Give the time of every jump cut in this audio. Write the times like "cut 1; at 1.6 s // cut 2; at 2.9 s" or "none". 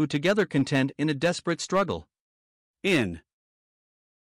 cut 1; at 2.7 s